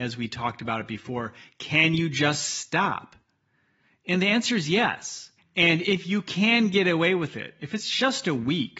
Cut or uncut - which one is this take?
cut